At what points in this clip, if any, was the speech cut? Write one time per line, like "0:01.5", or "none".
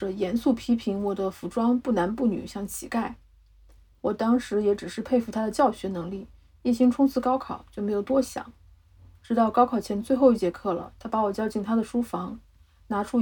none